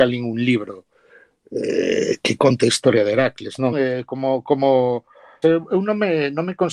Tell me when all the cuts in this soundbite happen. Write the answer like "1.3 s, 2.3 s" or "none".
3.7 s, 5.4 s